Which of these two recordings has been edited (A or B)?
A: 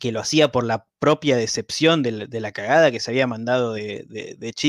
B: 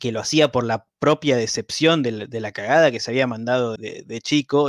B